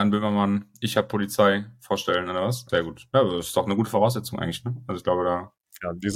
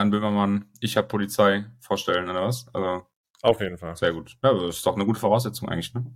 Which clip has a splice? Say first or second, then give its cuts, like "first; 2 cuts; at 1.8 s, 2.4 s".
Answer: first; 1 cut; at 2.7 s